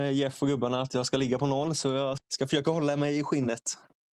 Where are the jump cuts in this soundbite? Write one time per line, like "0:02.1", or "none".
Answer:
0:02.2